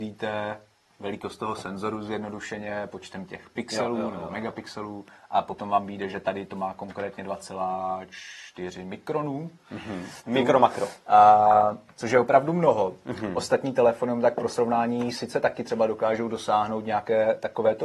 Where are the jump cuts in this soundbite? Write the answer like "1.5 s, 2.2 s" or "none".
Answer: 10.3 s